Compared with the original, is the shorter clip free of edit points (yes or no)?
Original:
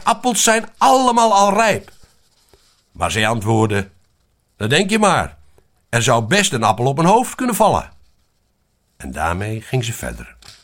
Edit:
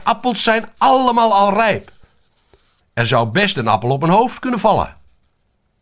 no